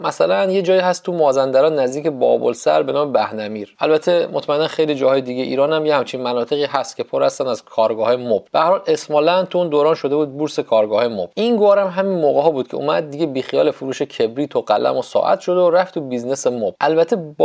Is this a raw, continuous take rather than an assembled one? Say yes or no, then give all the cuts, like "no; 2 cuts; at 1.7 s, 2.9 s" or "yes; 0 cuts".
yes; 0 cuts